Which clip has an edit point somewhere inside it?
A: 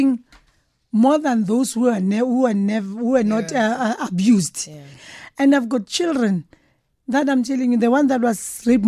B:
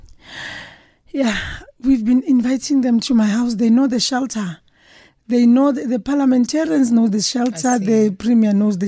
A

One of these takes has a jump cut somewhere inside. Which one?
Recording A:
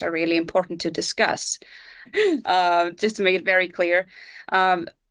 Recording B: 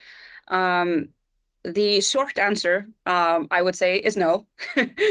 A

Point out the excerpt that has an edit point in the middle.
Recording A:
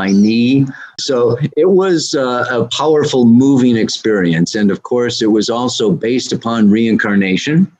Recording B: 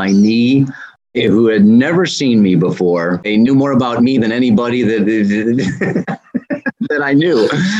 A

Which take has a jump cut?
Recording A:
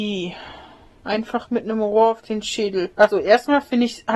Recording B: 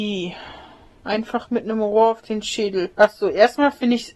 A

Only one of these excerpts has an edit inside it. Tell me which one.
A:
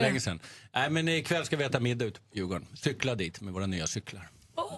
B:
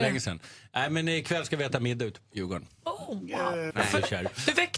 B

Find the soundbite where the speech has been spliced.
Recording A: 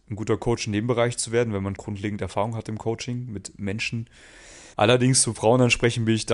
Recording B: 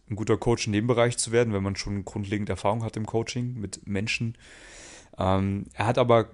A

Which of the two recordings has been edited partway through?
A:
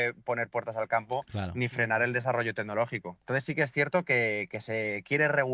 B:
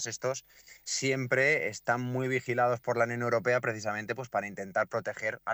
A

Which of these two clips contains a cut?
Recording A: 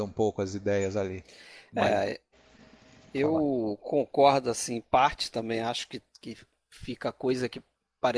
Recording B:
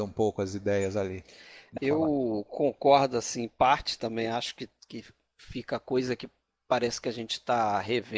B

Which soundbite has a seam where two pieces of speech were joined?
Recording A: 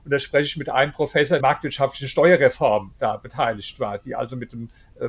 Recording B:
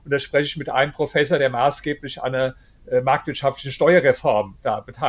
A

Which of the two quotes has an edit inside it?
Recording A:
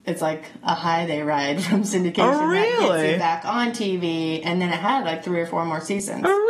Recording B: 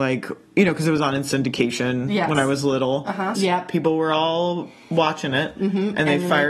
B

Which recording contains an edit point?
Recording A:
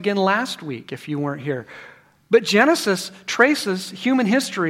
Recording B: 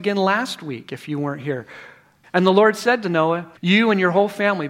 B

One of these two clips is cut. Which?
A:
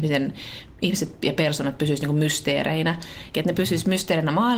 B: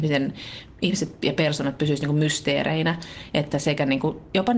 A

